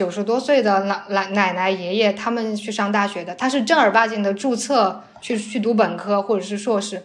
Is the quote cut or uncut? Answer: uncut